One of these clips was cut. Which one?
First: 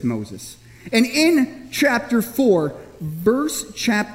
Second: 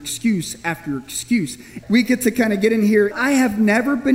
second; 2 cuts; at 1.8 s, 3.1 s

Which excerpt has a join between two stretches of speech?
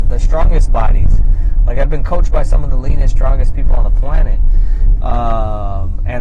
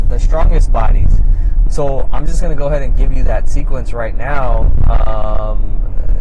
second; 1 cut; at 1.7 s

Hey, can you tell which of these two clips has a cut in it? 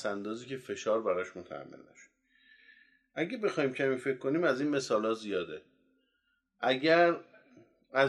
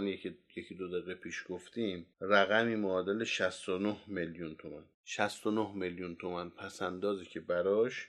second; 2 cuts; at 2.1 s, 4.9 s

